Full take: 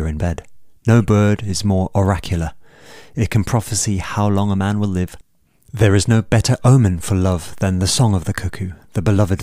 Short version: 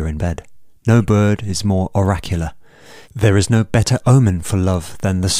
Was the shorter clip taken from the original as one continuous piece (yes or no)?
no